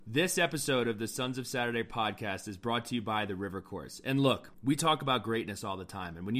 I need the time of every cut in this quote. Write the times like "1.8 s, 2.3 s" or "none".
4.5 s